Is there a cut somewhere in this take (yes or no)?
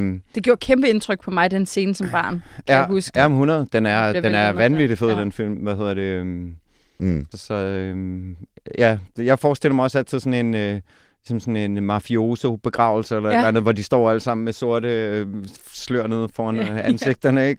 yes